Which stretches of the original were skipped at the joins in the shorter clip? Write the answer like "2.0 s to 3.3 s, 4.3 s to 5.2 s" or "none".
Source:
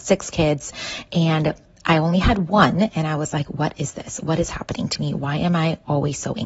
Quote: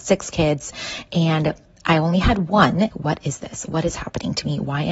2.9 s to 3.4 s

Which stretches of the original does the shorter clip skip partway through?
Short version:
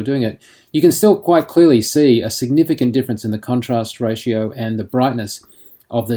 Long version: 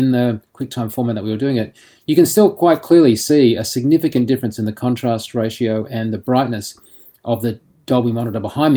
none

